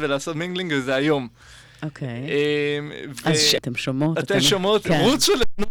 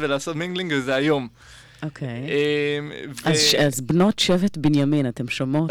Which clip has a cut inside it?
first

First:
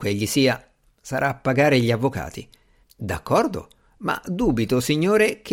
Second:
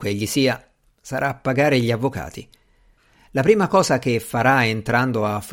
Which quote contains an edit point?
first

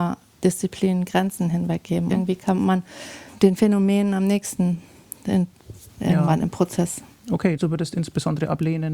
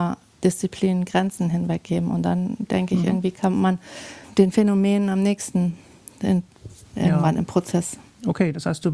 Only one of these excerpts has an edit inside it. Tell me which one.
first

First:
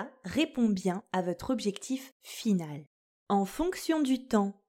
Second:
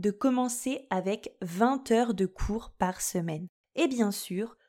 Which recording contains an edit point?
second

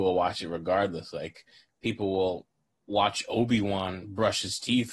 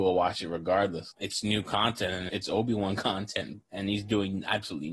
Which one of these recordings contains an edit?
second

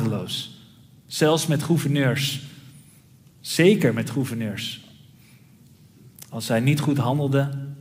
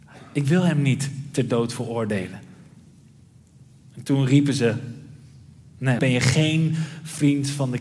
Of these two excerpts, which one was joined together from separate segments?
second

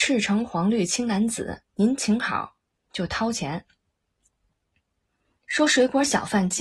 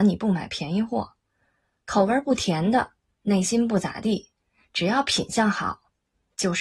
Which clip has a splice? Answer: first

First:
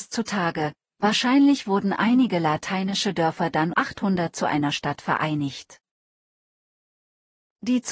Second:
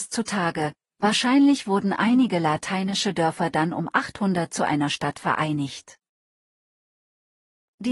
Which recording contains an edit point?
first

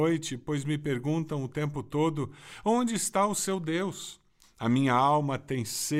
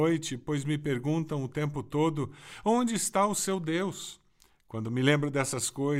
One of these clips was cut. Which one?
first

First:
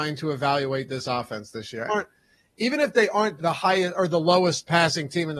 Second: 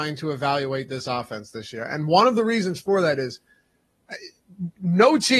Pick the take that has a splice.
first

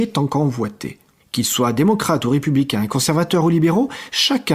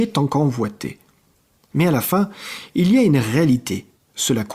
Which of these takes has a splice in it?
first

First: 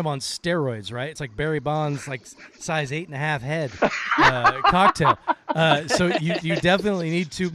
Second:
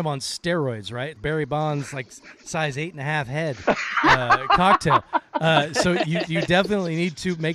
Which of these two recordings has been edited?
second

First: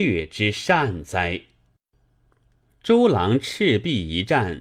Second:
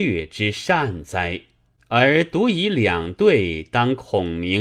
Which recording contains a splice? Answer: second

